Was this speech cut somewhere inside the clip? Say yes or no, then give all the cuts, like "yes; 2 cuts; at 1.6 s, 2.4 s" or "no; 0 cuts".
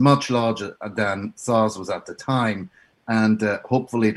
no; 0 cuts